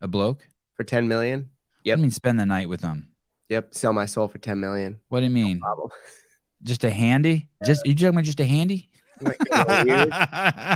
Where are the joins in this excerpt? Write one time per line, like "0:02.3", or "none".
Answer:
0:07.6
0:09.2